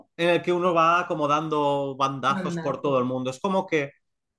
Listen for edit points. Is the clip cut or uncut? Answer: uncut